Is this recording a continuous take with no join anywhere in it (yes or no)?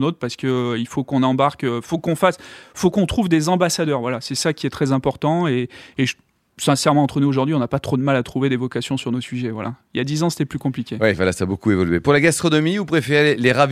yes